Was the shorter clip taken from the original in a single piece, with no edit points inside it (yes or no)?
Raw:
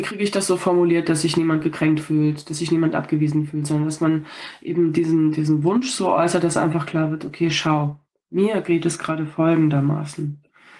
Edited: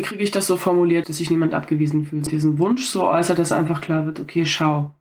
no